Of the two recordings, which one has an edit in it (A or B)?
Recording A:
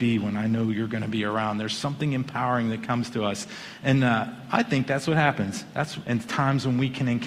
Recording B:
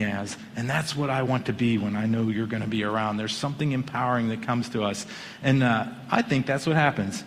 A